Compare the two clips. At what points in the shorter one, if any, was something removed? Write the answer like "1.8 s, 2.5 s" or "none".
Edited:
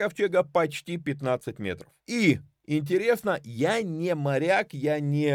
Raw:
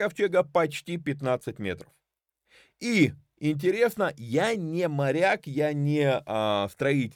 2.0 s